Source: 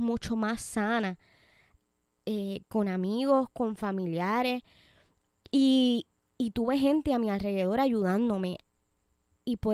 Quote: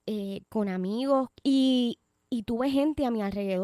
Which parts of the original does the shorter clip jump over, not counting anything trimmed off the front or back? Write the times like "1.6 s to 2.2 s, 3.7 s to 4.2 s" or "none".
3.5 s to 5.4 s